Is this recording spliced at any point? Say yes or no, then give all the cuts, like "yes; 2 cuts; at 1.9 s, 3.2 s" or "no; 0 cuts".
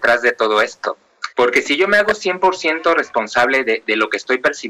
yes; 1 cut; at 1.3 s